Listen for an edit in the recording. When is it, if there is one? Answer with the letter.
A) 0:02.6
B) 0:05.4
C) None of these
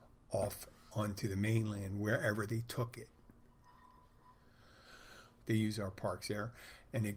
B